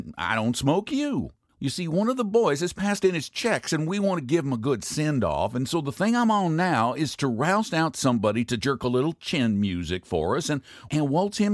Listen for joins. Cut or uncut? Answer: uncut